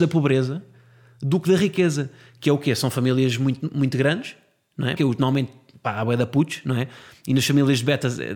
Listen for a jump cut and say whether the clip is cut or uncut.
cut